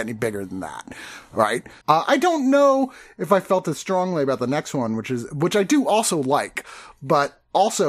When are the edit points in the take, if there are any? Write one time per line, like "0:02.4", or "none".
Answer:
0:01.8